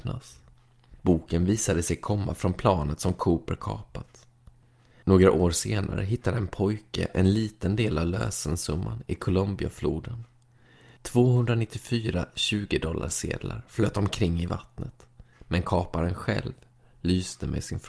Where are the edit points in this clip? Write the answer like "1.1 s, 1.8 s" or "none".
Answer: none